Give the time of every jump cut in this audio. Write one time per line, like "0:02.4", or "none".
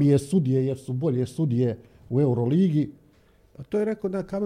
none